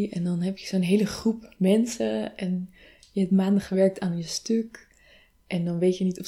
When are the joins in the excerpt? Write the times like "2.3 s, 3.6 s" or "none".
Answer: none